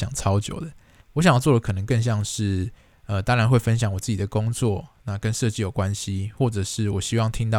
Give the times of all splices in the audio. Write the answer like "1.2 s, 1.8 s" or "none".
1.0 s